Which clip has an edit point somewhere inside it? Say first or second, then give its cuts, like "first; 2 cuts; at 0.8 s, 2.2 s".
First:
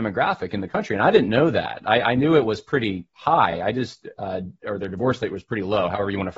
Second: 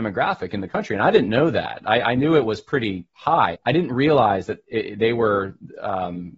second; 1 cut; at 3.5 s